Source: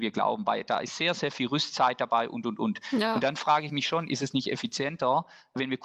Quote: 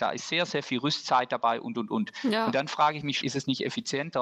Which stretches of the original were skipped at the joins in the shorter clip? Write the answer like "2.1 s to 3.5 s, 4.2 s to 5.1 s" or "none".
3.9 s to 4.1 s